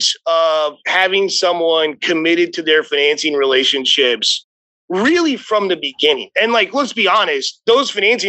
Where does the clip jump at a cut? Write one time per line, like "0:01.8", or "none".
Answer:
none